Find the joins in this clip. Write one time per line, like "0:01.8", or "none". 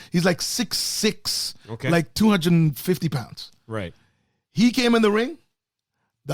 none